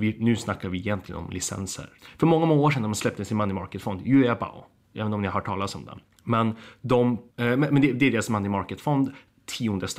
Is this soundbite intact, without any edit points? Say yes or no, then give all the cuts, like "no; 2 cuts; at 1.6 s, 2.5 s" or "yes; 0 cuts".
no; 1 cut; at 7.3 s